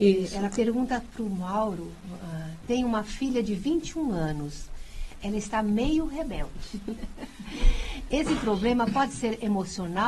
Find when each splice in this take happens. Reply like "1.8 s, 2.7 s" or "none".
none